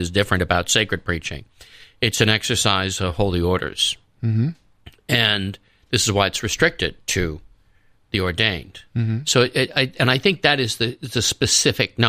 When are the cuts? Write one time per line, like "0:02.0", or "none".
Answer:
none